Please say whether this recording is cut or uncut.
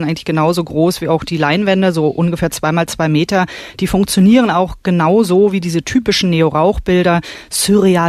uncut